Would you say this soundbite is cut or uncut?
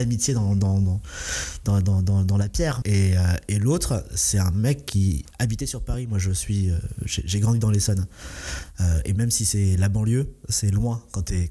cut